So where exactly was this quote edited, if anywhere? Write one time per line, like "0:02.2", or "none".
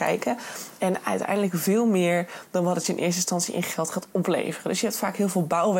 none